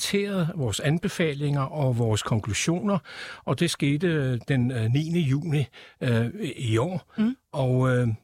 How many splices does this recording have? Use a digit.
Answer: 0